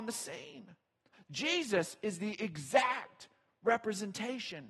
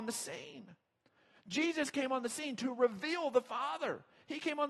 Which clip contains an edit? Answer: first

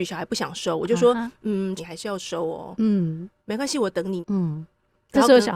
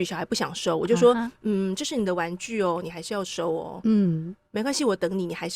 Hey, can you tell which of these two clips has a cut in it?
first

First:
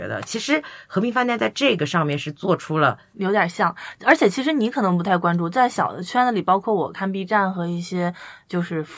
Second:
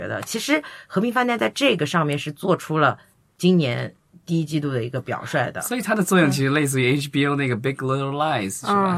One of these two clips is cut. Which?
first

